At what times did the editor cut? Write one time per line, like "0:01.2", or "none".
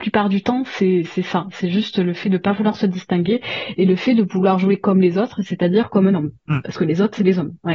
0:06.4